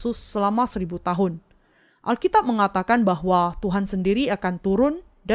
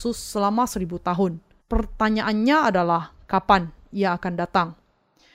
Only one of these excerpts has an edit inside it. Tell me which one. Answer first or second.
second